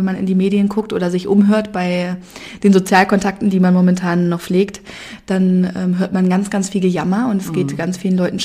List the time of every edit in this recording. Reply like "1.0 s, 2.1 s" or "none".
none